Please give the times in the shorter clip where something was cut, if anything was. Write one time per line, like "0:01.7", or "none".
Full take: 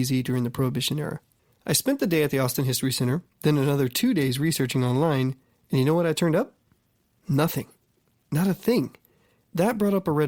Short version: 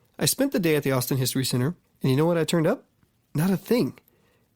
0:01.8
0:03.1